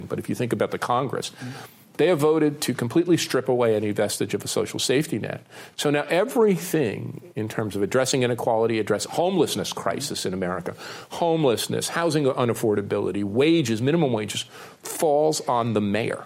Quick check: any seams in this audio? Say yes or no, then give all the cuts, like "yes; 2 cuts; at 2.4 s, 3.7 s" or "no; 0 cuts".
no; 0 cuts